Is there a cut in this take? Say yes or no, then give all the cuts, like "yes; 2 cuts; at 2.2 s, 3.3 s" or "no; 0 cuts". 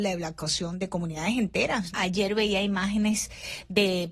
yes; 1 cut; at 1.9 s